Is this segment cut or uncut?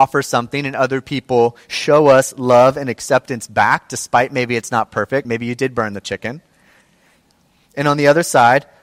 cut